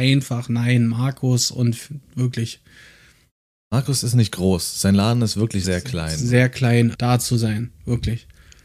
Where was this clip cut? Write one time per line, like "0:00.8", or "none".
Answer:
0:05.6
0:06.9